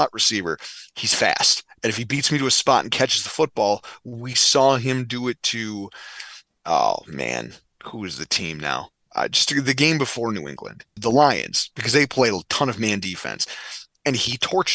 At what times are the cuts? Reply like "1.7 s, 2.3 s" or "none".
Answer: 9.1 s, 11.0 s